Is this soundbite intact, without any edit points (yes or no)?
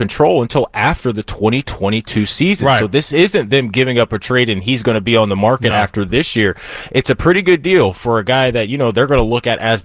yes